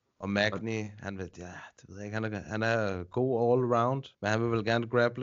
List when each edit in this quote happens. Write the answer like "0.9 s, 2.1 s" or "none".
4.1 s